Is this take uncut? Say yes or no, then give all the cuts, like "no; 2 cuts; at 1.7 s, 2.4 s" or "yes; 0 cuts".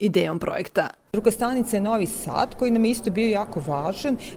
no; 1 cut; at 1.1 s